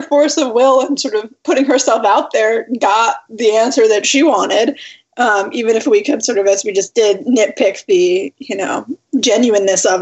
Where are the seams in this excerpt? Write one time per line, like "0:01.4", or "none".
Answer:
none